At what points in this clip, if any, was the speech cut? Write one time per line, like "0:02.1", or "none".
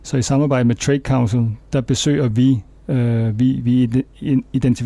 none